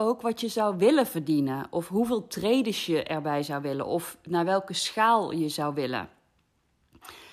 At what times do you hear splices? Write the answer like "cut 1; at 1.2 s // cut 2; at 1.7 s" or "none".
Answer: none